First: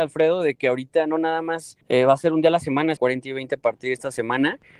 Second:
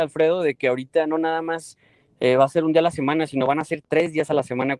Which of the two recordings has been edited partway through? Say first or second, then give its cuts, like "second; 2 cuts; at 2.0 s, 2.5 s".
first; 2 cuts; at 1.8 s, 3.0 s